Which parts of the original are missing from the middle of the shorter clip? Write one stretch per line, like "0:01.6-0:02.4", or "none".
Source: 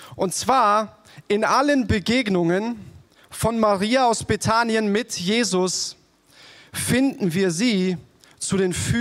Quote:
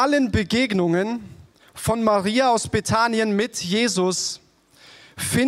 none